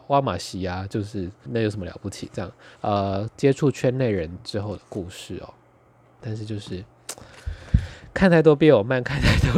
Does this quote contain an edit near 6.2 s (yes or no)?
yes